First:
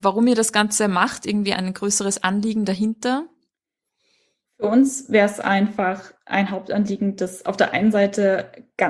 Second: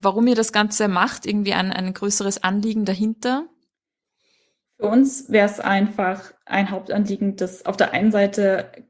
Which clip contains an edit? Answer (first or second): first